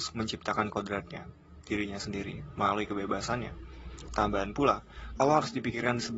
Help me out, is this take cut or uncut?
cut